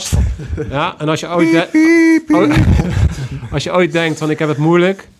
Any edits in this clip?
no; 0 cuts

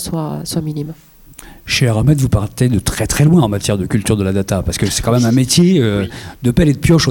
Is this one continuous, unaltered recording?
yes; 0 cuts

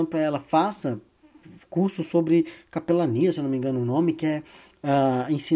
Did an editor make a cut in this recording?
no; 0 cuts

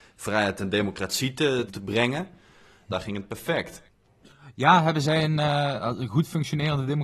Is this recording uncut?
no; 2 cuts; at 1.7 s, 2.9 s

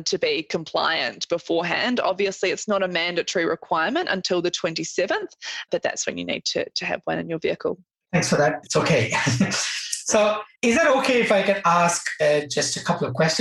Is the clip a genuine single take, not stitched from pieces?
no; 1 cut; at 8.6 s

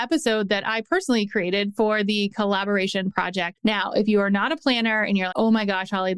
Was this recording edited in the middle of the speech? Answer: yes; 2 cuts; at 3.6 s, 5.3 s

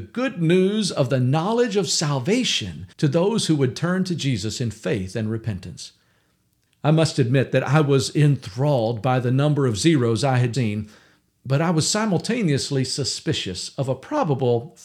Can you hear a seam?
yes; 3 cuts; at 2.9 s, 6.7 s, 10.5 s

